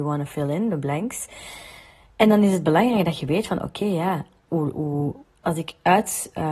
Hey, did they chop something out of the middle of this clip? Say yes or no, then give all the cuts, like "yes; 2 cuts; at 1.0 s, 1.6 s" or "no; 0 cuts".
no; 0 cuts